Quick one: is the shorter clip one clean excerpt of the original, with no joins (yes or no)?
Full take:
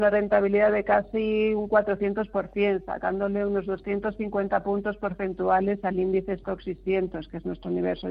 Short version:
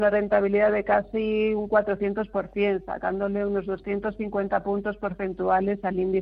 yes